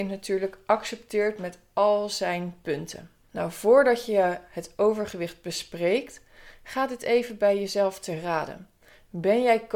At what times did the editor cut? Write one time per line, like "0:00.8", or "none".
none